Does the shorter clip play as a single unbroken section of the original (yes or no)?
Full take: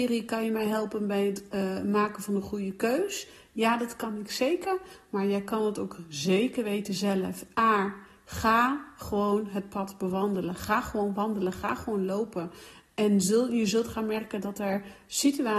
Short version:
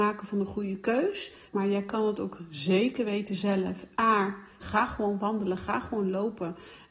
no